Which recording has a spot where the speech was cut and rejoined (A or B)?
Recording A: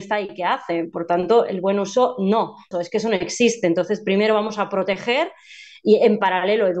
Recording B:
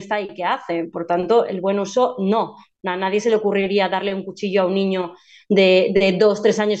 A